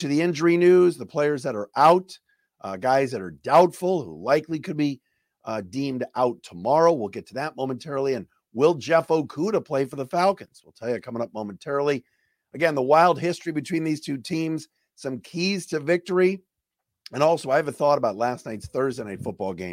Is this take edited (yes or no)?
no